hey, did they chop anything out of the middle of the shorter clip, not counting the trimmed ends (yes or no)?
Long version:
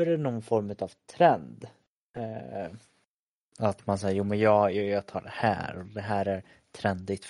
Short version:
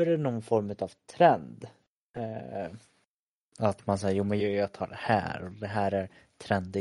yes